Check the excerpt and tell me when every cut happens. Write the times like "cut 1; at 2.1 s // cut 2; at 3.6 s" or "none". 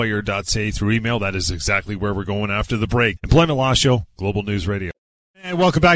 cut 1; at 3.2 s